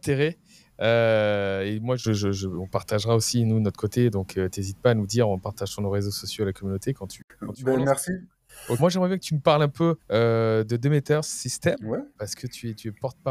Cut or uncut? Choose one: cut